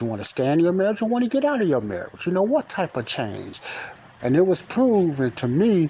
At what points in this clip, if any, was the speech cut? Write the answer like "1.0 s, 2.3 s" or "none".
4.2 s